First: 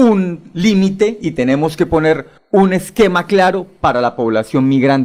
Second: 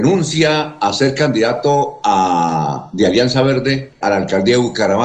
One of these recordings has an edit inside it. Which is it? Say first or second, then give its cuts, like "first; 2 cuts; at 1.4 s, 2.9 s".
second; 1 cut; at 4.0 s